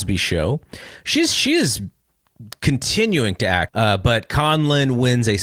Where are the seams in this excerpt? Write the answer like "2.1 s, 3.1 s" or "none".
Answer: 3.7 s